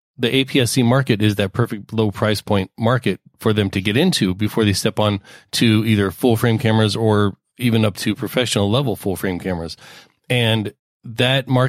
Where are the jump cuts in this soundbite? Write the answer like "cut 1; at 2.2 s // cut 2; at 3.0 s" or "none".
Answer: none

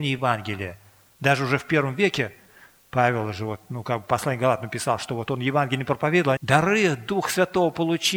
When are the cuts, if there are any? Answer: cut 1; at 6.4 s

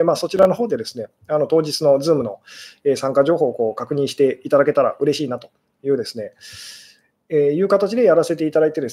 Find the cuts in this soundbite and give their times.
cut 1; at 7.1 s

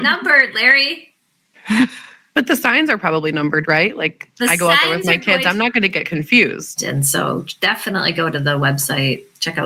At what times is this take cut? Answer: cut 1; at 6.8 s

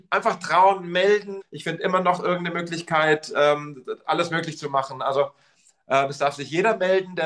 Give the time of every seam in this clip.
cut 1; at 1.4 s

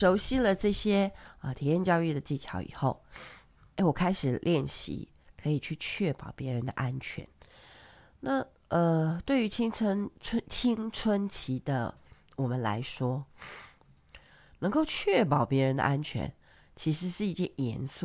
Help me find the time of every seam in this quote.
cut 1; at 3.8 s

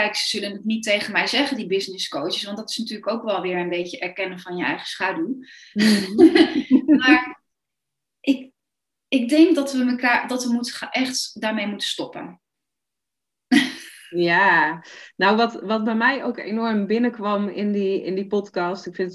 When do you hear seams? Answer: none

